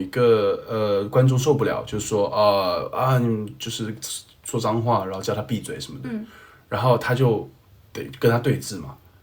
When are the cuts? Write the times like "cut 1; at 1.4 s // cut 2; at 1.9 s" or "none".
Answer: none